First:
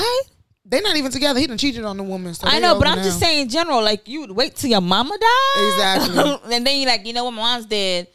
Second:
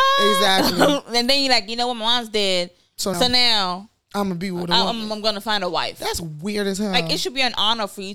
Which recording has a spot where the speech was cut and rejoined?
second; 1 cut; at 3.1 s

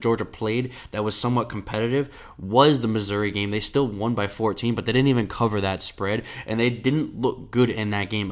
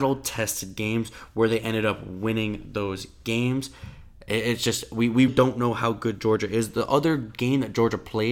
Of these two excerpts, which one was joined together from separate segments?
second; 1 cut; at 5.3 s

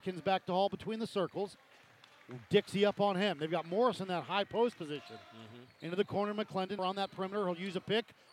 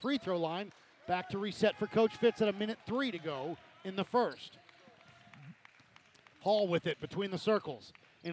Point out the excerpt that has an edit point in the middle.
first; 1 cut; at 6.8 s

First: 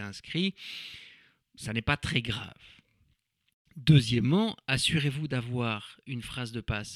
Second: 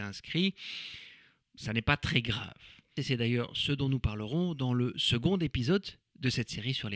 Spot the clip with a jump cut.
second; 1 cut; at 2.9 s

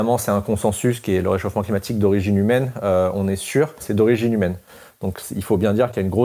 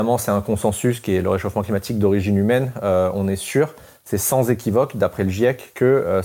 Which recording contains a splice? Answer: first; 1 cut; at 3.8 s

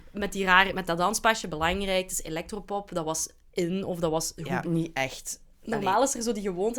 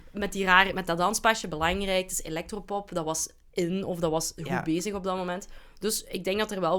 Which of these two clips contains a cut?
first; 1 cut; at 4.6 s

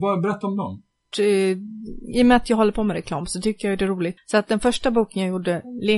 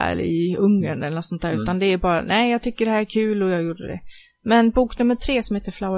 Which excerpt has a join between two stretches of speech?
first; 2 cuts; at 1.1 s, 4.2 s

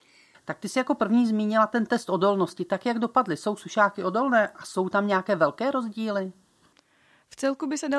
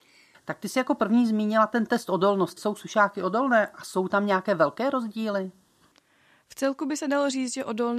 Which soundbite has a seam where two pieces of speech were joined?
second; 1 cut; at 2.6 s

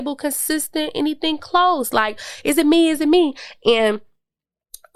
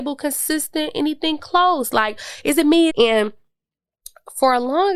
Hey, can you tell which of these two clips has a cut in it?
second; 1 cut; at 2.9 s

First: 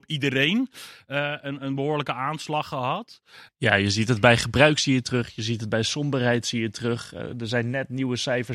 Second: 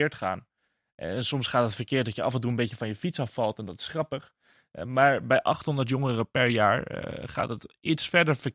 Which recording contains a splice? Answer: first; 1 cut; at 3.5 s

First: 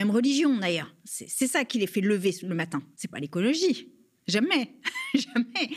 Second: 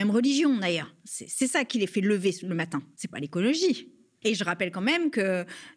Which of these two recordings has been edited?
second; 1 cut; at 4.2 s

